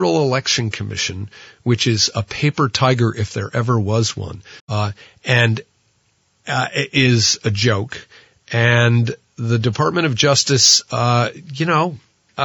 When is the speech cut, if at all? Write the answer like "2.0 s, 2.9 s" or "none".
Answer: 4.6 s